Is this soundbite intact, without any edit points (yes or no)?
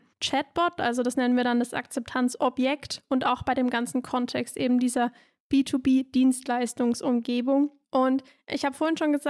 yes